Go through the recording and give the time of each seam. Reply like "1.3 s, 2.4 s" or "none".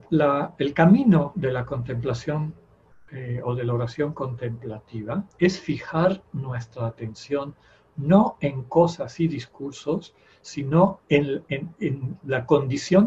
5.3 s